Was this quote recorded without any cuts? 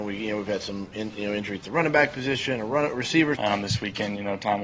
no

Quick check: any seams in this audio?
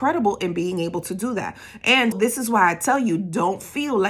yes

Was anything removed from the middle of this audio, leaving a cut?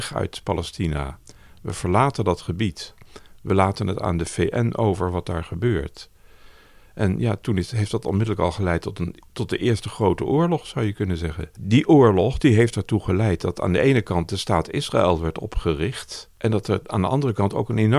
no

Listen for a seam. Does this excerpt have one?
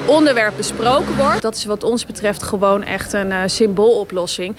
yes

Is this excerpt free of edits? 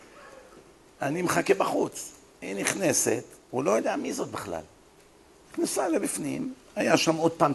yes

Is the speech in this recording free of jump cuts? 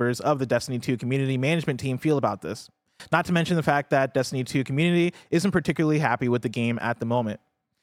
yes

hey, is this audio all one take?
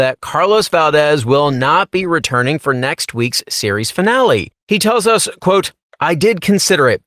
yes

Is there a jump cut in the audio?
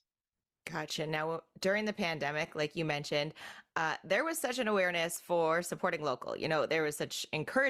no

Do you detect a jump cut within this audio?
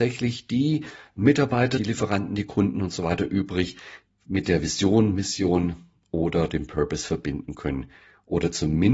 yes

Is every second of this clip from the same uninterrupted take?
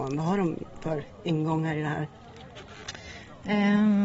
yes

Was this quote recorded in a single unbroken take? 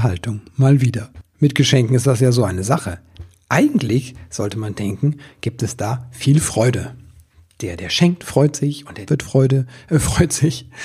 no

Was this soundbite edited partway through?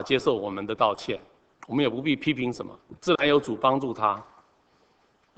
yes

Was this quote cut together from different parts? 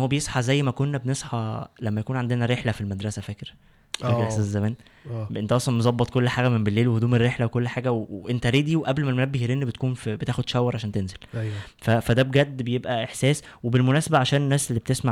no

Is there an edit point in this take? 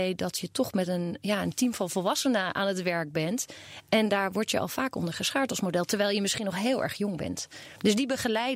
no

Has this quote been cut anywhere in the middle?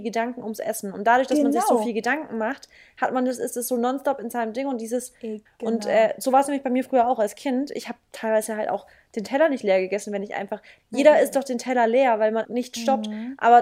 yes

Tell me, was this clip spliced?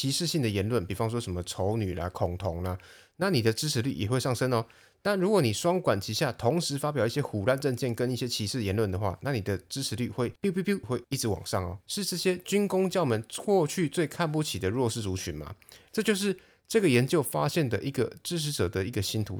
yes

